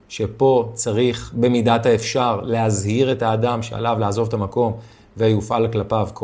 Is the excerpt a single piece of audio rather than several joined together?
yes; 0 cuts

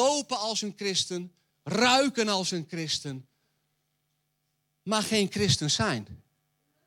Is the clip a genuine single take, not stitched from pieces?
no; 1 cut; at 1.5 s

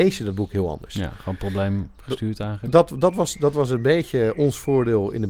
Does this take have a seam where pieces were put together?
no; 0 cuts

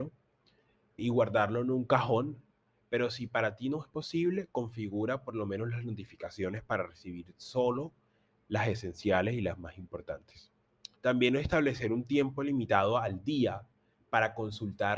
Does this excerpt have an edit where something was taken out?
yes; 2 cuts; at 1.0 s, 11.0 s

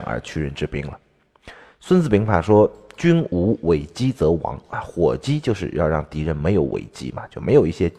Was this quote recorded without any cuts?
yes; 0 cuts

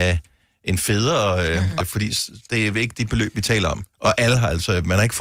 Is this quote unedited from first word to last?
no; 2 cuts; at 1.8 s, 3.9 s

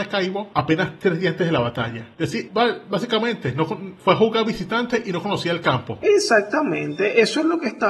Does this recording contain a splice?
yes; 2 cuts; at 2.5 s, 6.0 s

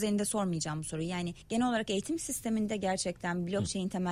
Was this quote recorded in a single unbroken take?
no; 1 cut; at 1.4 s

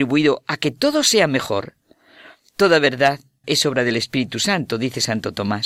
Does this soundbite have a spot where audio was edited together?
yes; 1 cut; at 3.4 s

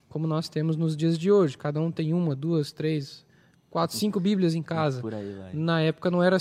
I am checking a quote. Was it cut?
no; 0 cuts

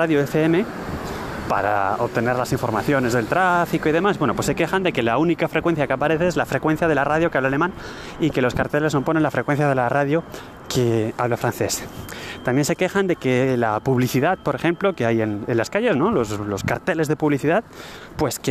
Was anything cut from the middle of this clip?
no; 0 cuts

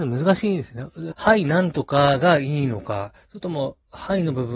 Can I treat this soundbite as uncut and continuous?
no; 1 cut; at 1.1 s

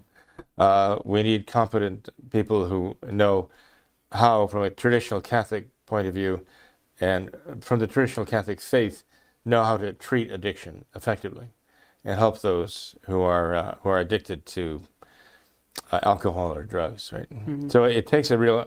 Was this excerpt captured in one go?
yes; 0 cuts

